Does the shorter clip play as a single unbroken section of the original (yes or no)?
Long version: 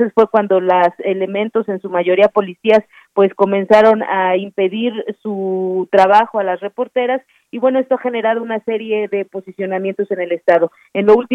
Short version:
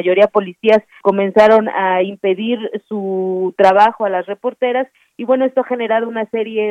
no